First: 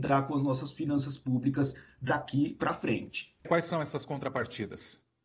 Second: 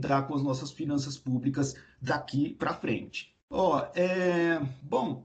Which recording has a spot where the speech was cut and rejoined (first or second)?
second